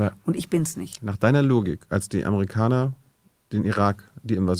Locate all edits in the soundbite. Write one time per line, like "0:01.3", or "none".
none